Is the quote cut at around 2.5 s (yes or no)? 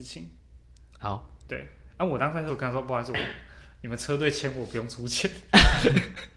yes